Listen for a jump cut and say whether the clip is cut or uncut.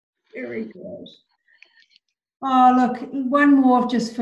uncut